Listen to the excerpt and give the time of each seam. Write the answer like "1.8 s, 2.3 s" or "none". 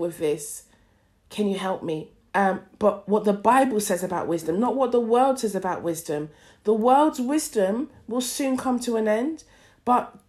2.3 s